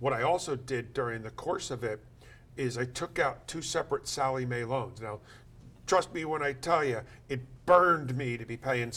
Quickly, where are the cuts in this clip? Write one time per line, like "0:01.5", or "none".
none